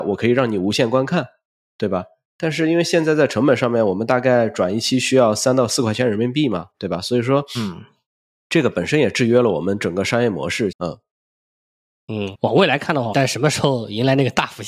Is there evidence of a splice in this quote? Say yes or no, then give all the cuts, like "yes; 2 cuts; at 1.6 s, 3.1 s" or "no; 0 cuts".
yes; 2 cuts; at 10.7 s, 13.1 s